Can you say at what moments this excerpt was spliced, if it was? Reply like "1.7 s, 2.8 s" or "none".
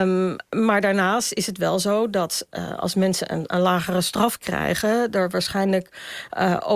none

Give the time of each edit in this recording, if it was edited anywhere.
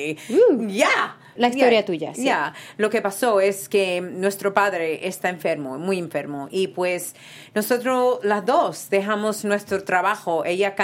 1.4 s

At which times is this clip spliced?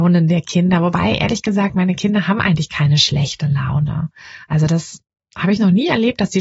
none

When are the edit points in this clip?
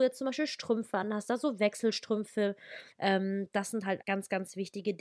2.9 s, 4.0 s

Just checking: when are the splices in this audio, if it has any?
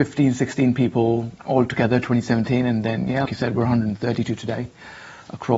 1.4 s, 3.3 s

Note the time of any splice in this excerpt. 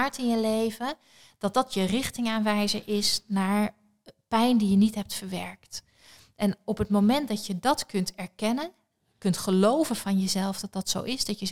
none

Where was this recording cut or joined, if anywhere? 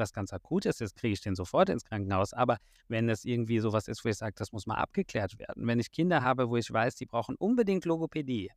none

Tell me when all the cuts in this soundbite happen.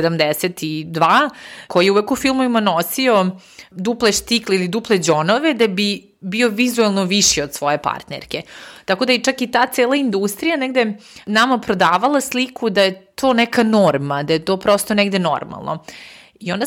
none

